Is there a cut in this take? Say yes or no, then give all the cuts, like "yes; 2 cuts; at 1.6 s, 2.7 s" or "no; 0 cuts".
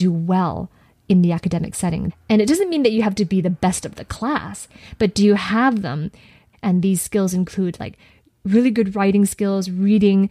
yes; 2 cuts; at 2.1 s, 6.5 s